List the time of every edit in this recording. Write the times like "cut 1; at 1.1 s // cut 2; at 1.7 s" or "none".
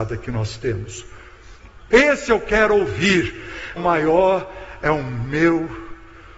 cut 1; at 1.9 s // cut 2; at 3.8 s